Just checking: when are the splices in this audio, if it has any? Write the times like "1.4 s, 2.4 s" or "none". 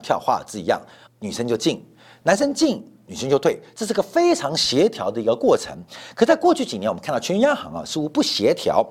1.1 s